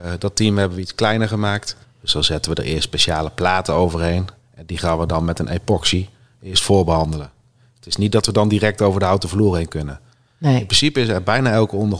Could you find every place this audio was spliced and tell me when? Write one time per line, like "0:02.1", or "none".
0:01.8